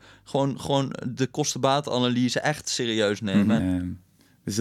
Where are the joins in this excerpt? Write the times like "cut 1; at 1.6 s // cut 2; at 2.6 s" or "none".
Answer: cut 1; at 3.6 s